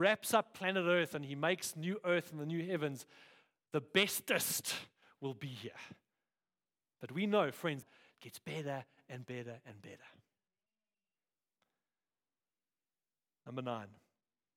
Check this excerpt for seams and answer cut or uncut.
cut